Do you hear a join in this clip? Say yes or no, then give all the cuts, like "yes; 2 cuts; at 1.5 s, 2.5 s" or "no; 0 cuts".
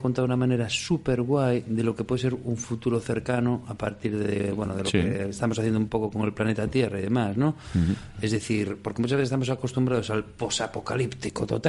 no; 0 cuts